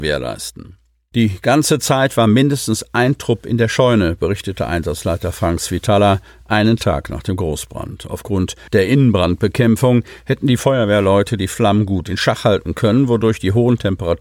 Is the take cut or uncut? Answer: uncut